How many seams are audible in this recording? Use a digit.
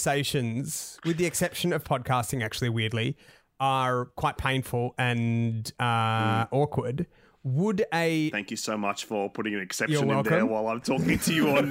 0